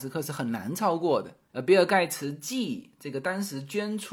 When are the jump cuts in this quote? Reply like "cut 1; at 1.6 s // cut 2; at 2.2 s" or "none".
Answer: cut 1; at 1.5 s